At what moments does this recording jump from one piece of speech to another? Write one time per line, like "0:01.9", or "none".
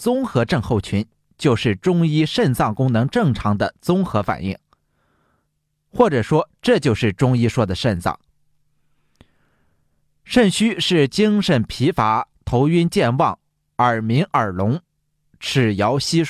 0:15.2